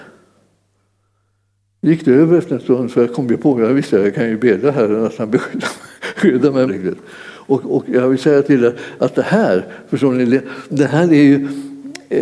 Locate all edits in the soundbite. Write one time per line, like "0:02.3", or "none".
0:06.7
0:10.7